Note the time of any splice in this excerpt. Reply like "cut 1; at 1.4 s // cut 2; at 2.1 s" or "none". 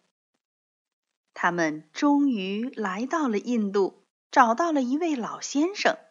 cut 1; at 1.3 s // cut 2; at 4.2 s